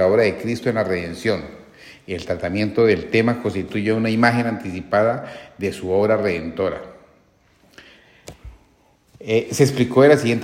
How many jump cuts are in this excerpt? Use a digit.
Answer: 0